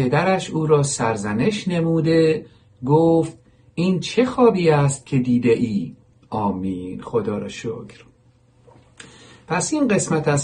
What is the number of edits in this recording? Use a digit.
1